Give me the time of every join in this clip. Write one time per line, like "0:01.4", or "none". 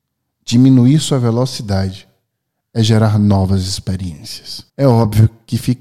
0:04.7